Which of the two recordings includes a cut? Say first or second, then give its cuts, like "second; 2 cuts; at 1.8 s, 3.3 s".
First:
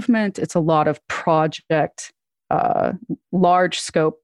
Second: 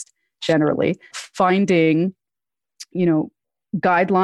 second; 1 cut; at 1.1 s